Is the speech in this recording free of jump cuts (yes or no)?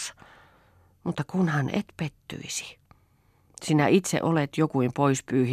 yes